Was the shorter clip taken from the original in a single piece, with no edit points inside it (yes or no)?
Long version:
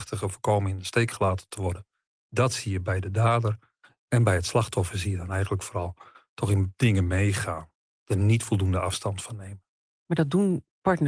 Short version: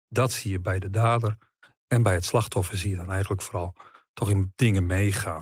yes